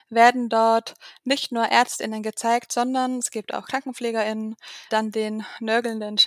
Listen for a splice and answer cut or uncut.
cut